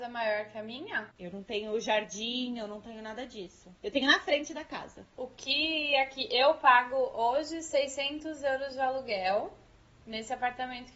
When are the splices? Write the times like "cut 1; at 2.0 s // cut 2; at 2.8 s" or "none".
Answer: cut 1; at 1.2 s